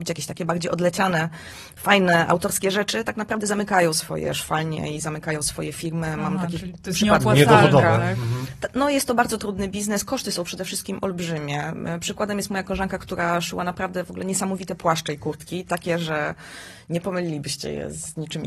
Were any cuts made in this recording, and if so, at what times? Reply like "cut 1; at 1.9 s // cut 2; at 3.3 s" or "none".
none